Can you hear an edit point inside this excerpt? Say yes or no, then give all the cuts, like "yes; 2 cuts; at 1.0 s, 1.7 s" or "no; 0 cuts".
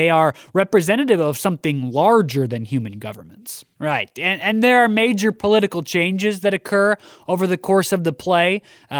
yes; 1 cut; at 3.7 s